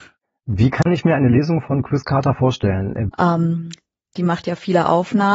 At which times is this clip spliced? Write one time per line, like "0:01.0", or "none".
0:03.1